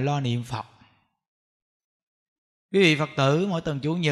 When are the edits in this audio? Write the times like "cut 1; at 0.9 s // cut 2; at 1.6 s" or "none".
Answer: cut 1; at 2.7 s